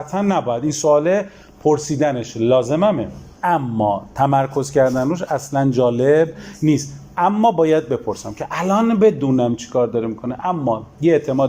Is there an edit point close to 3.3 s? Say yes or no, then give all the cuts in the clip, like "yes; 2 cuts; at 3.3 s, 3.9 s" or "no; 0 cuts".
yes; 1 cut; at 3.3 s